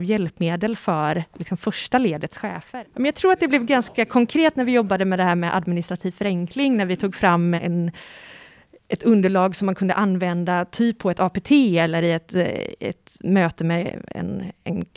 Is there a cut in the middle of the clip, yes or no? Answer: yes